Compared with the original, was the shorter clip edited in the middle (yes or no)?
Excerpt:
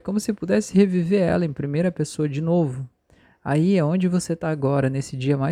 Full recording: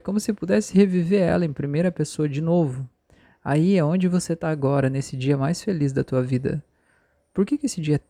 no